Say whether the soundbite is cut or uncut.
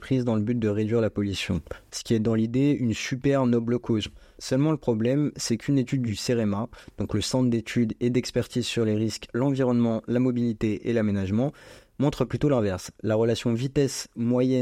uncut